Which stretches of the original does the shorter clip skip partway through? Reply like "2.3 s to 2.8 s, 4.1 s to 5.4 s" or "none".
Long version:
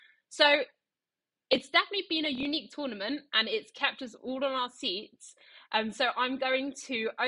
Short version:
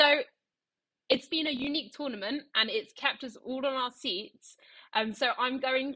1.7 s to 2.1 s